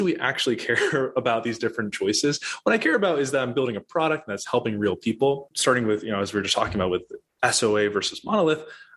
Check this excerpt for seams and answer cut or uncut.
cut